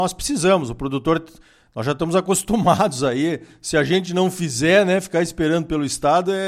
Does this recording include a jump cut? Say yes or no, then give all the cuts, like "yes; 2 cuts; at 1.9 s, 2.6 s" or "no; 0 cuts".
no; 0 cuts